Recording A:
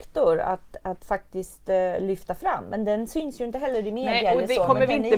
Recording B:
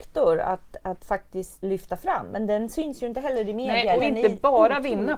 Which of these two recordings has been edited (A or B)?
B